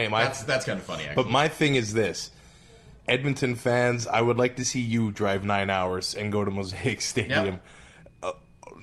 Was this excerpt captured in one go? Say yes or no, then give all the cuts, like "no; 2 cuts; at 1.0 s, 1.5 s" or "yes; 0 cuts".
yes; 0 cuts